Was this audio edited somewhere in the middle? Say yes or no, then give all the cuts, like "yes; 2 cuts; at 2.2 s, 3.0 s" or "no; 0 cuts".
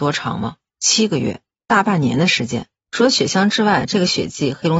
yes; 1 cut; at 2.8 s